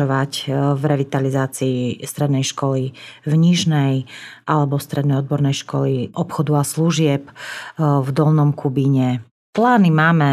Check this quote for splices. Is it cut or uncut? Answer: uncut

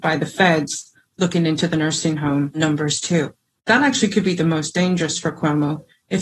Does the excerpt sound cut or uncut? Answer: uncut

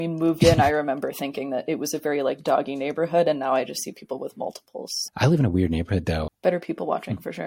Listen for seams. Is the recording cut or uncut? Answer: cut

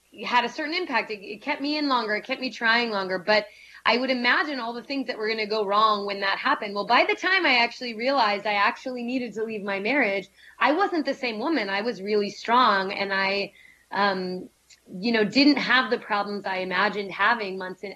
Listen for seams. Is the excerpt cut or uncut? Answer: uncut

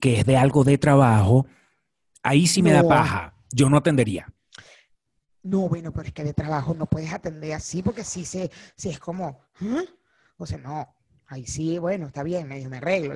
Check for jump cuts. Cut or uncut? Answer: uncut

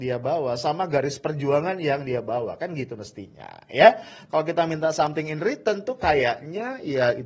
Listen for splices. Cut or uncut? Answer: cut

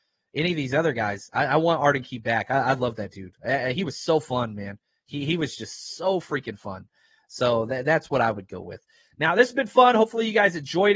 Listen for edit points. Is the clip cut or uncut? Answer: uncut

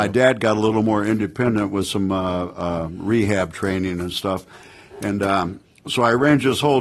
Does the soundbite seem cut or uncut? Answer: uncut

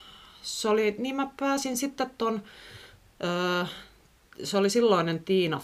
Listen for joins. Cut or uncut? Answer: uncut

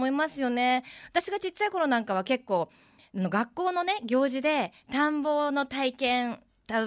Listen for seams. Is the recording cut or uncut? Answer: uncut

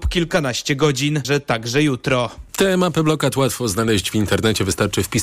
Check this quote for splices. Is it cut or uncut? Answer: cut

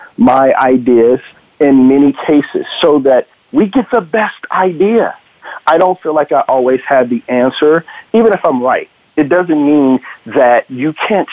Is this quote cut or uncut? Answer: uncut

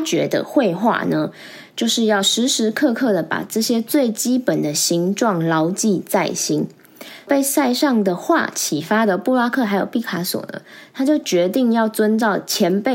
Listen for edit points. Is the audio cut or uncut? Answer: uncut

